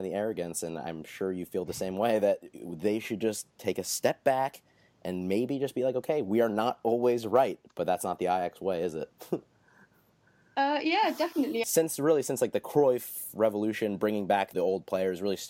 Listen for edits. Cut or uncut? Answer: cut